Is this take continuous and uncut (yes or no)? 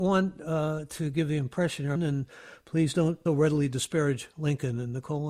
no